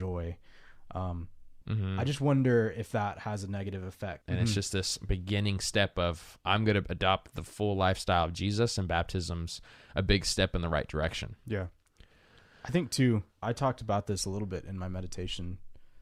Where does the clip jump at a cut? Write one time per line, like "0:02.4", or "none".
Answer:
0:01.6
0:04.2
0:13.4